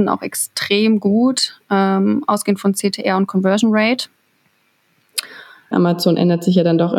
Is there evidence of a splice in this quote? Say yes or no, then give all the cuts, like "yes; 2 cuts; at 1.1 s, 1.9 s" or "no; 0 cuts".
yes; 1 cut; at 5.7 s